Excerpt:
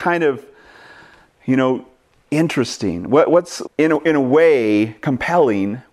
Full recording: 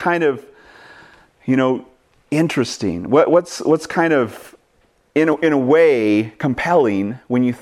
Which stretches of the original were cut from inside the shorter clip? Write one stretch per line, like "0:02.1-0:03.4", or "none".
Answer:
0:03.6-0:05.0

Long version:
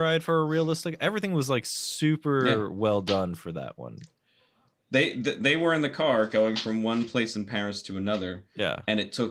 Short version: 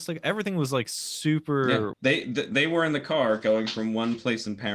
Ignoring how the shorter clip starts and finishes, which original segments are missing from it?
0:02.7-0:04.8

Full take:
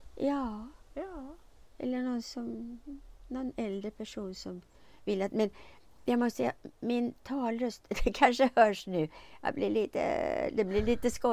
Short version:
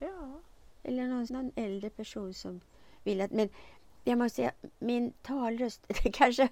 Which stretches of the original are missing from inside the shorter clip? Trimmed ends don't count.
0:02.2-0:03.3

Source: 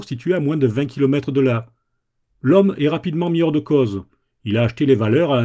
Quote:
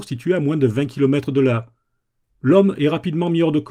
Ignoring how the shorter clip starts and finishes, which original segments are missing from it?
none

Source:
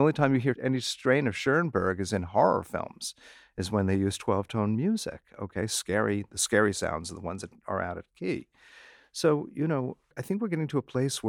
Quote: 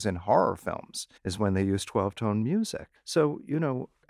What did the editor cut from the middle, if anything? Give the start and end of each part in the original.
0:03.2-0:03.5
0:05.3-0:09.0

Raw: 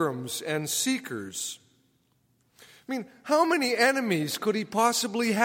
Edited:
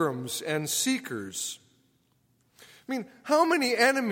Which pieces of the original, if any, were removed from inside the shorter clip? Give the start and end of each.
none

